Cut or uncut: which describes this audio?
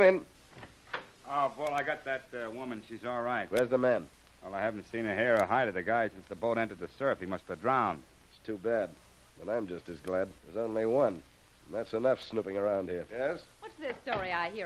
cut